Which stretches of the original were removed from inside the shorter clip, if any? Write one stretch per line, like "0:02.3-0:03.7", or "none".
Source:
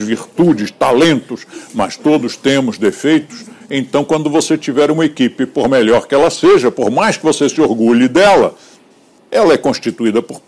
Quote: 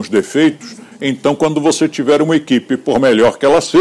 none